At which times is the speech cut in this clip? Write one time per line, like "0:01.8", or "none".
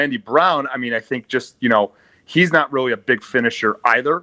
none